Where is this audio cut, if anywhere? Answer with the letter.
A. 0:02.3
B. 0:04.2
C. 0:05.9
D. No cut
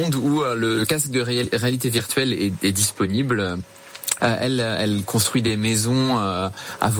B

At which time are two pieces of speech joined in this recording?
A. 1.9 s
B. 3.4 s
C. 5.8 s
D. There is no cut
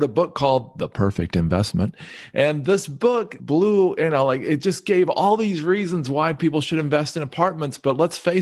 B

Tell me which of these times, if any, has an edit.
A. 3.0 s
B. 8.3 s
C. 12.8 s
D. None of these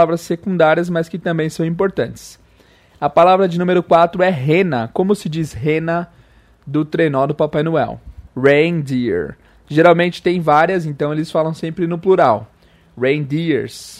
B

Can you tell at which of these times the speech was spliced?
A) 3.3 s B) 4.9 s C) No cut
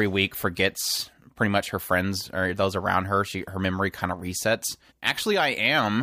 B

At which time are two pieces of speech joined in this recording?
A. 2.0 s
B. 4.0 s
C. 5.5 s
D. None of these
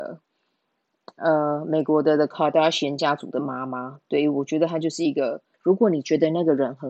C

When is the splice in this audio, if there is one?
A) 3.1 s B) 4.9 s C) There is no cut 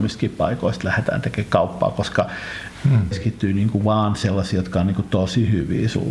A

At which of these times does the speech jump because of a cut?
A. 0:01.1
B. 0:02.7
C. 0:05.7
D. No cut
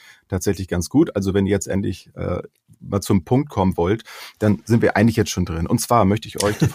D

